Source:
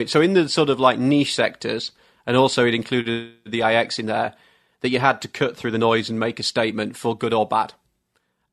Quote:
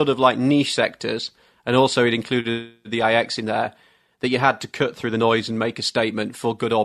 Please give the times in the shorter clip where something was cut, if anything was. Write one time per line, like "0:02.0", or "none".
none